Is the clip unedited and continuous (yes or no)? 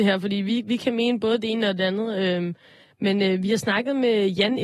yes